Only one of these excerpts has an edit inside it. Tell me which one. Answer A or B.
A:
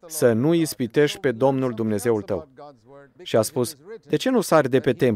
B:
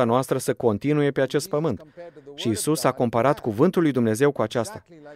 A